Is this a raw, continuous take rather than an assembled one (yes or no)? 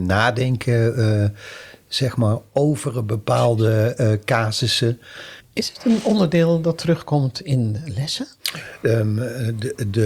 no